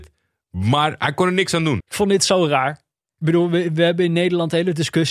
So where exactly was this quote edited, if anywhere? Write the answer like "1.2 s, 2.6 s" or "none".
1.8 s